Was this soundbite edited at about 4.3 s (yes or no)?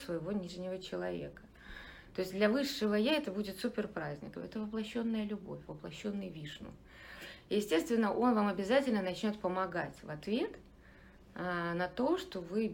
yes